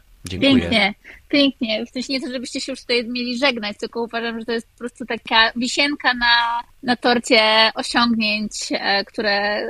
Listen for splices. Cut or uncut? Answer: cut